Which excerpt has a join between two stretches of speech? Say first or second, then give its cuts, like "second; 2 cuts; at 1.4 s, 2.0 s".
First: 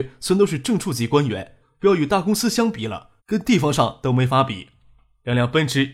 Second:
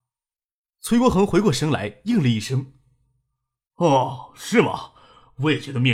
first; 2 cuts; at 1.6 s, 3.2 s